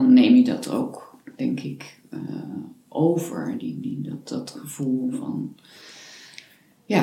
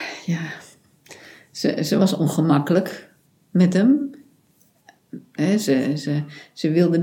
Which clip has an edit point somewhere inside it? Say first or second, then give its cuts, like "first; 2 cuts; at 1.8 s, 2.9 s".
second; 1 cut; at 5.4 s